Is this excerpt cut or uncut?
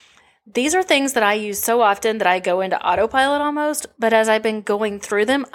uncut